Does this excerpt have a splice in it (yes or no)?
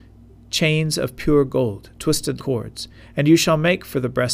yes